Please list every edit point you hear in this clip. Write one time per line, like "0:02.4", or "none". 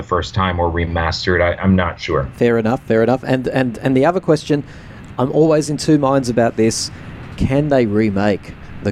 none